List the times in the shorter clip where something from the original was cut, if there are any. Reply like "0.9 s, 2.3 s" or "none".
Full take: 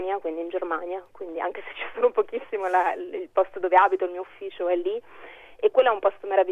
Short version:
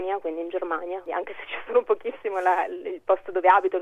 1.1 s